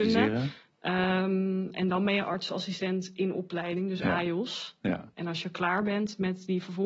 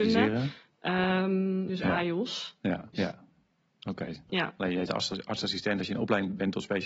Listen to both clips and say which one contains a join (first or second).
second